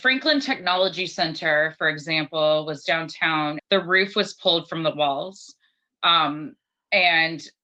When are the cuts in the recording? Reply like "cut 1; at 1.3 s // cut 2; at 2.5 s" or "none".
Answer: cut 1; at 3.6 s